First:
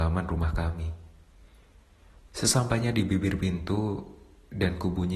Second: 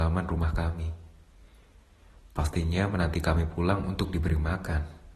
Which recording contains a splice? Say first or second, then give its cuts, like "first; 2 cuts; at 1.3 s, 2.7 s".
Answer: first; 1 cut; at 2.3 s